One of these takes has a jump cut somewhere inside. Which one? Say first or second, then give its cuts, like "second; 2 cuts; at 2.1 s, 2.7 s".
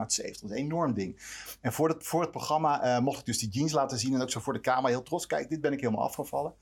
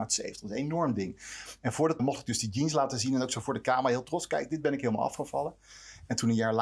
second; 1 cut; at 2.0 s